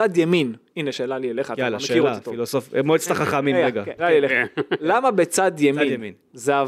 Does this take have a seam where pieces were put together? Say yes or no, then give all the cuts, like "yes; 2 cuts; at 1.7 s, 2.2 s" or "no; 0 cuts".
yes; 2 cuts; at 0.9 s, 4.0 s